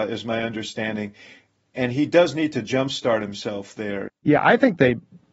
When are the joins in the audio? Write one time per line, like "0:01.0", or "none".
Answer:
0:04.1